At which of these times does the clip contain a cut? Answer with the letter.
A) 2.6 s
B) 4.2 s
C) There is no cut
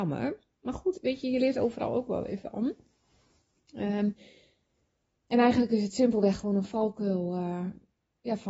C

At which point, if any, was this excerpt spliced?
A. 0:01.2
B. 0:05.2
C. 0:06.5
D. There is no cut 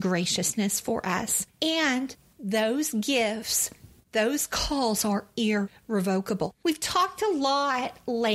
C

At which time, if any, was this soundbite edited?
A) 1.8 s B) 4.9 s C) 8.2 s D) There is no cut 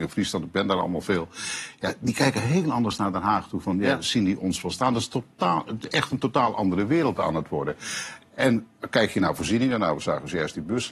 D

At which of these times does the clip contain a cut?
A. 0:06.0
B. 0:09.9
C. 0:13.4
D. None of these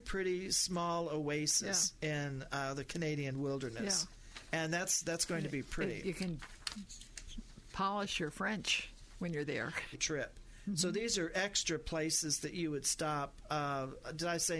B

